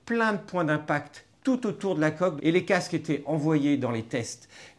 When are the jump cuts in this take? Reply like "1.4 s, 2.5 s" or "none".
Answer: 2.4 s